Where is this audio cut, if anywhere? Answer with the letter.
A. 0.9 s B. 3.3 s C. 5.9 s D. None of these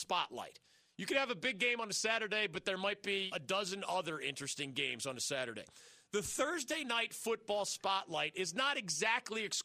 B